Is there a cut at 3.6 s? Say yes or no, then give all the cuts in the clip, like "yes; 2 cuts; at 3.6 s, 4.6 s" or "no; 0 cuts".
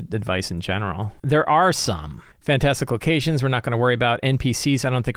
no; 2 cuts; at 1.2 s, 2.3 s